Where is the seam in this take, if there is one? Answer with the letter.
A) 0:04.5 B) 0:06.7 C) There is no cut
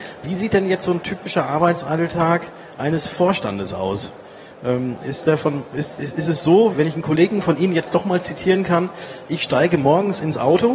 B